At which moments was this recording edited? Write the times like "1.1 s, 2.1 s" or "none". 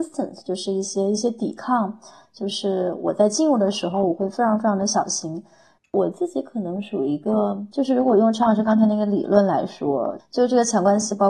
5.8 s, 10.2 s